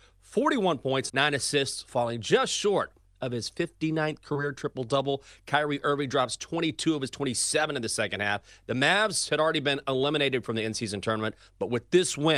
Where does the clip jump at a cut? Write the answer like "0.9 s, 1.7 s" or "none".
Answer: 1.1 s